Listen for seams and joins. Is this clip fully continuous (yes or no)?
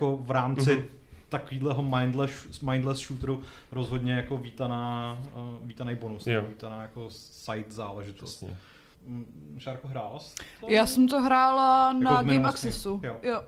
no